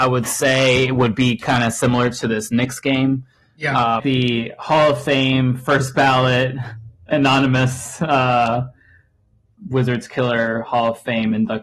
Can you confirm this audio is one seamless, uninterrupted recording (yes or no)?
no